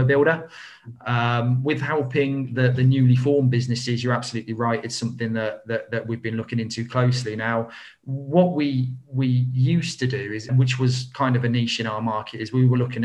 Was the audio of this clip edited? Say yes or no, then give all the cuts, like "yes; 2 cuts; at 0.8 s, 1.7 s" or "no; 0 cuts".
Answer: yes; 1 cut; at 10.5 s